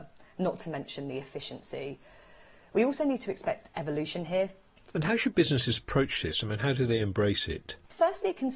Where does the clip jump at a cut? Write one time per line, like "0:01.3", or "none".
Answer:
0:04.9